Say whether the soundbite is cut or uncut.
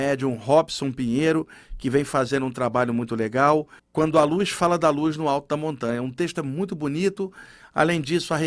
cut